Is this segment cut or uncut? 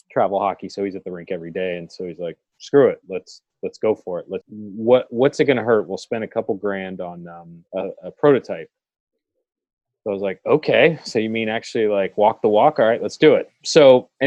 cut